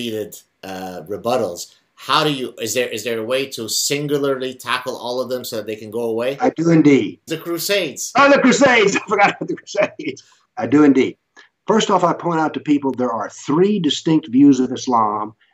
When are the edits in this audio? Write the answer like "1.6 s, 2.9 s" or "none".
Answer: 7.3 s, 10.4 s